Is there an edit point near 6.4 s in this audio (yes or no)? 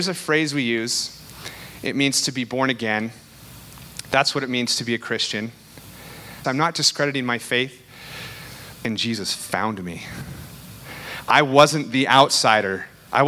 yes